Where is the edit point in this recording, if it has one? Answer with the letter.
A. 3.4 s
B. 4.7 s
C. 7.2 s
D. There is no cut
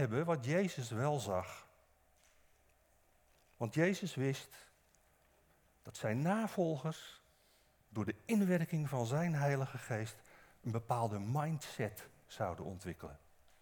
D